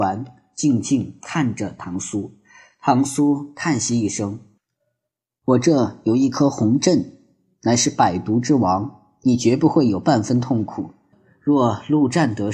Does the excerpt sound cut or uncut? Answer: cut